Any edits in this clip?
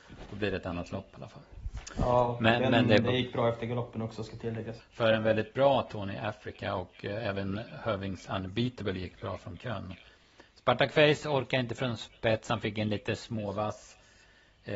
yes; 1 cut; at 4.8 s

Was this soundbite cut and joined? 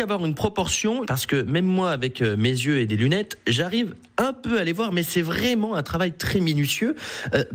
yes; 1 cut; at 1.0 s

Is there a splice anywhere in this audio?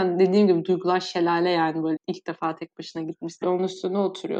yes; 2 cuts; at 2.0 s, 3.4 s

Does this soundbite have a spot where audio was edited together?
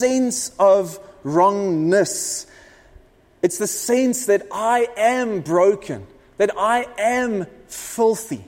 no; 0 cuts

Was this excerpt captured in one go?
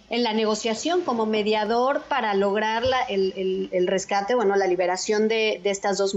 yes; 0 cuts

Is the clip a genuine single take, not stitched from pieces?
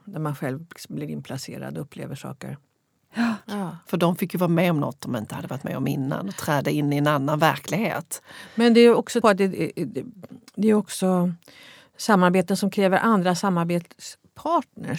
no; 2 cuts; at 3.4 s, 9.2 s

